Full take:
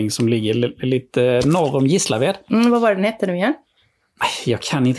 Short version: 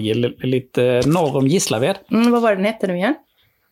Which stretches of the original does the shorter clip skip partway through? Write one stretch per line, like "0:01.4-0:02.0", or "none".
none